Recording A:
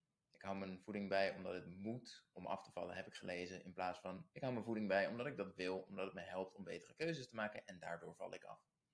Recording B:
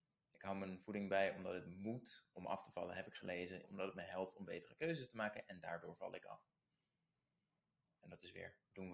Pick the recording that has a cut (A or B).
B